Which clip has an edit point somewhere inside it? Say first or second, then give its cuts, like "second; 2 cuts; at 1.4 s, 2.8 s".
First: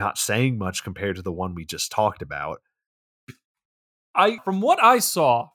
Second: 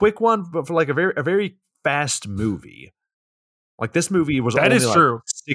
first; 1 cut; at 4.4 s